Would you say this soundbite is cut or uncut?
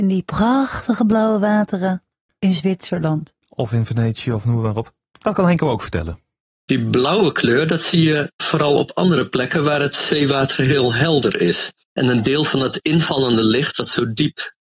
cut